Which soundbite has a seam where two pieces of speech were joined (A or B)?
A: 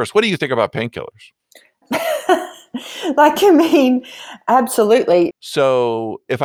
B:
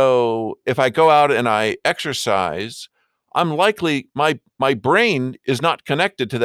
A